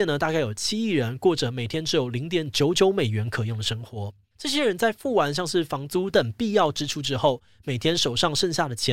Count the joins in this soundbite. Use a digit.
2